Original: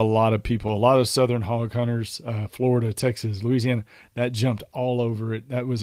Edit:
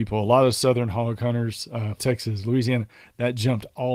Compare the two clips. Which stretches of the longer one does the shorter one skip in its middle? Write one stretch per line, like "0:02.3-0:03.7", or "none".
0:02.5-0:02.9